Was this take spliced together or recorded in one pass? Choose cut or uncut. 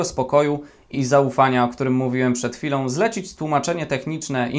cut